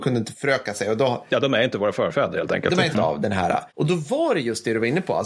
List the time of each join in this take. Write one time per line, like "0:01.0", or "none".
0:02.9